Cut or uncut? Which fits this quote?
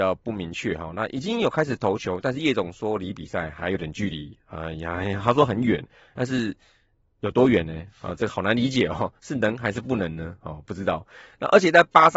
uncut